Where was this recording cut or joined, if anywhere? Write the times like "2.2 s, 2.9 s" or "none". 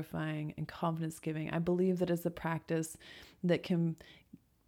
none